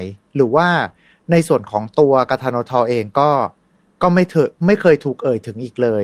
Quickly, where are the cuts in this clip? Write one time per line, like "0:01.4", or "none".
none